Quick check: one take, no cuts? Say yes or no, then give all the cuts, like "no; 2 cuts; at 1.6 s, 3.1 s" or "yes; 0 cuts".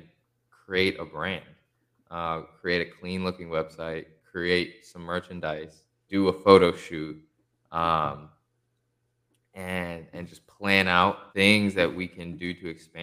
no; 2 cuts; at 6.1 s, 11.3 s